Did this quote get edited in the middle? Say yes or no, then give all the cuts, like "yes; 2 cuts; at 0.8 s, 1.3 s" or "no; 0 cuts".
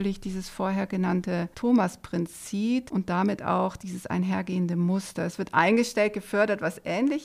no; 0 cuts